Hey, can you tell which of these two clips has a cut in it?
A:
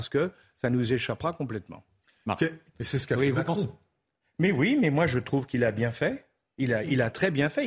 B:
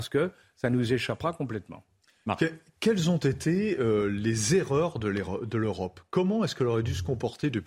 A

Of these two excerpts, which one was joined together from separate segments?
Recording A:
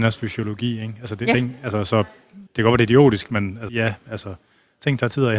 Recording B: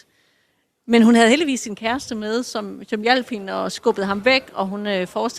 A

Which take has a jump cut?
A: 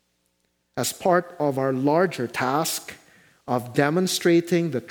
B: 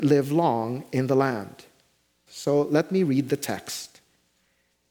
B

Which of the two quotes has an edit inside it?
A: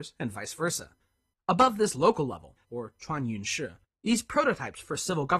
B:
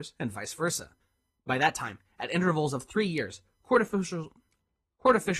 A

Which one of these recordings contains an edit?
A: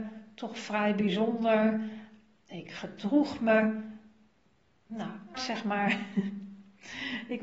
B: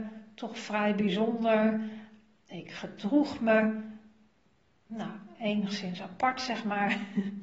A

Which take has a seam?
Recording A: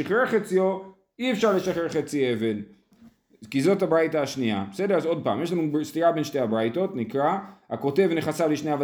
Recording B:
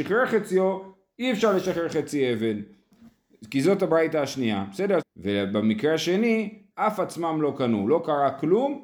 B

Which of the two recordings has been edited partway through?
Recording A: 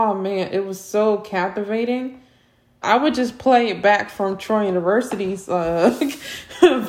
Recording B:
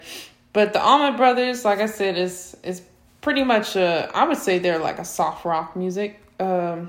A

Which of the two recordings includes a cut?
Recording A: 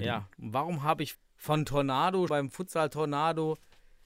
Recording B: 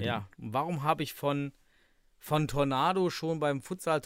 A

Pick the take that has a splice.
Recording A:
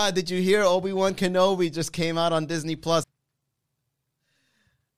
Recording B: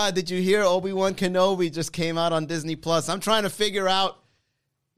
A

